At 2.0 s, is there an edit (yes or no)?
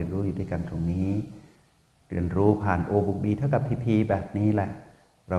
no